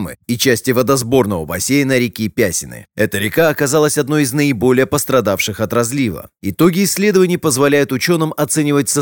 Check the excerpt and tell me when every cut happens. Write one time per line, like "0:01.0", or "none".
none